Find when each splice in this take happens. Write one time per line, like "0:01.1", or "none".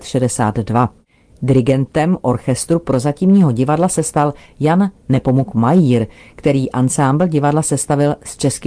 none